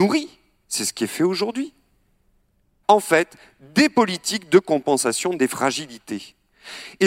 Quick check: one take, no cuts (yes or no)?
no